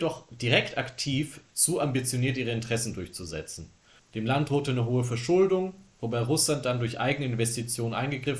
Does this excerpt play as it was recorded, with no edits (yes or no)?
no